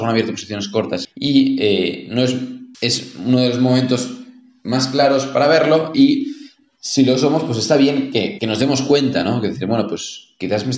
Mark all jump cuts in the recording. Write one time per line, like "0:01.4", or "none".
0:01.0
0:02.7
0:08.4